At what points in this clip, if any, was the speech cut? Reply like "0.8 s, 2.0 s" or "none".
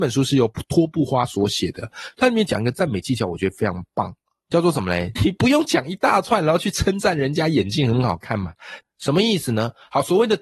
5.2 s, 8.8 s